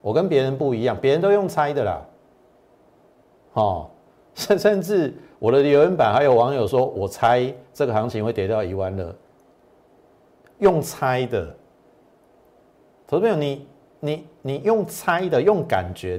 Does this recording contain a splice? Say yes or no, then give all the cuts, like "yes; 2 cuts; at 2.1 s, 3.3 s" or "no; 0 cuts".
no; 0 cuts